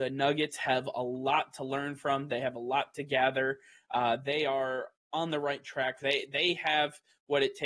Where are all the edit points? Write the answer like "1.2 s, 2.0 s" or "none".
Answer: 6.0 s